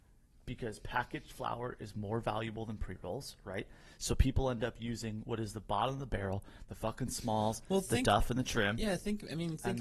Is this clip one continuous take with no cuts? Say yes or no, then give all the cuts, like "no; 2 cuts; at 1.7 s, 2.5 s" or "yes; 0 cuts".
yes; 0 cuts